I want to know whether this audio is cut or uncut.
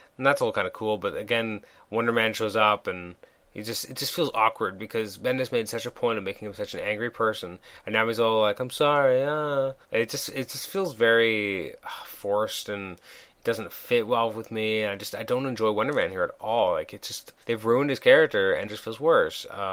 cut